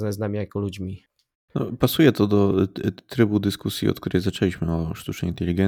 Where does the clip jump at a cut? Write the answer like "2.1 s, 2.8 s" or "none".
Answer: 1.3 s